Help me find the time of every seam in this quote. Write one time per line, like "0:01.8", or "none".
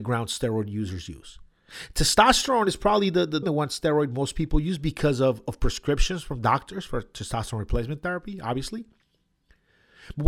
0:03.4